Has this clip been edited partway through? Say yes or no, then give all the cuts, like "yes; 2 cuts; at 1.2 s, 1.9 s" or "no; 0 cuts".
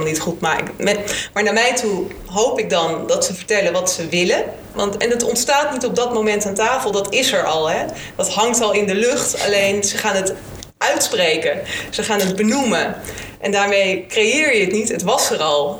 yes; 1 cut; at 4.7 s